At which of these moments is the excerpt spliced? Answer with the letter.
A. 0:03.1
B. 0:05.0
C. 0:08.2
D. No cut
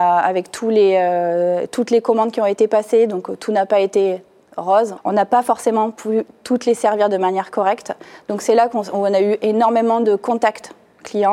B